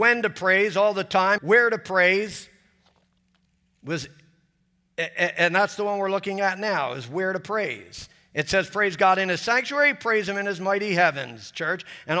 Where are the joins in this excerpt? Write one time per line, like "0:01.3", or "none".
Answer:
0:01.4